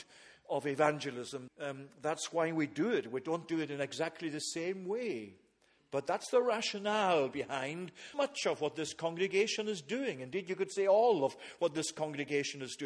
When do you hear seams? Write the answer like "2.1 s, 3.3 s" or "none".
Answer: 1.5 s, 8.1 s